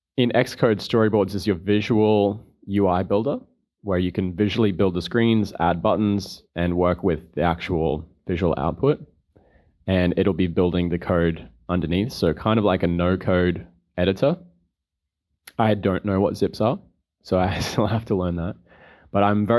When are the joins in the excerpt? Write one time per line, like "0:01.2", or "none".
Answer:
none